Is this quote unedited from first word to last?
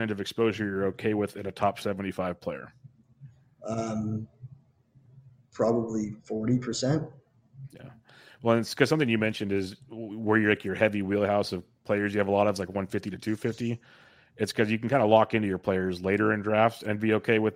yes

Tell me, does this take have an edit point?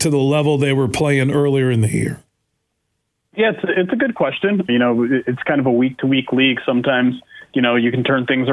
yes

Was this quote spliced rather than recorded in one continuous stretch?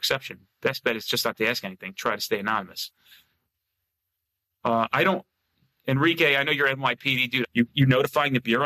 yes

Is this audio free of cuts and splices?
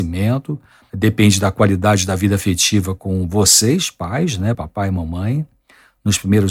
yes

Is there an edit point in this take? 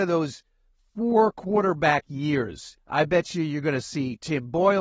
yes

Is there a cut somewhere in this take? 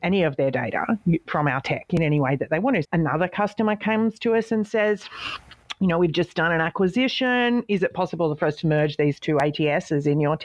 yes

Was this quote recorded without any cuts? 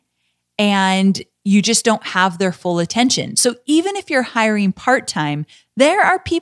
yes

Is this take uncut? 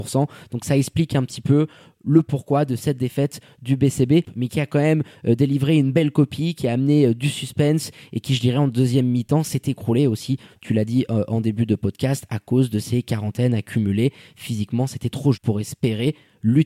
no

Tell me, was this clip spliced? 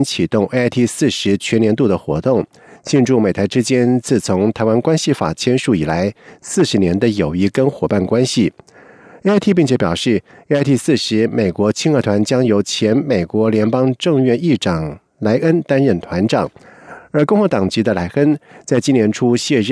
no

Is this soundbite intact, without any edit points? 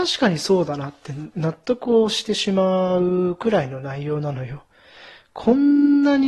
yes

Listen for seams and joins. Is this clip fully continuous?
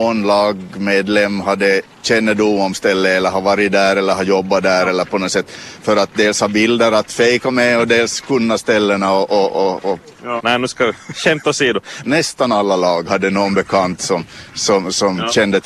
no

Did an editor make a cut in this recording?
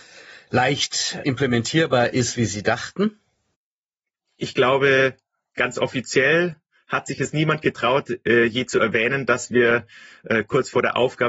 no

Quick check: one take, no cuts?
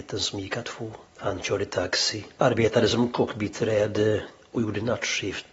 no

